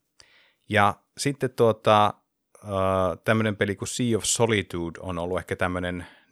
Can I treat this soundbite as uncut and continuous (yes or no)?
yes